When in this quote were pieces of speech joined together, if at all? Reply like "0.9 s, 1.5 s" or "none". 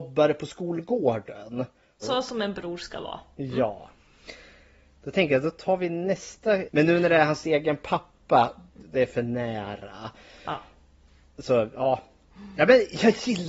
2.0 s, 6.7 s, 8.8 s